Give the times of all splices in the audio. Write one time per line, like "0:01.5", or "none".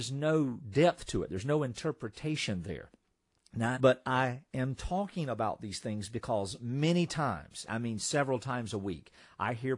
0:03.7
0:07.7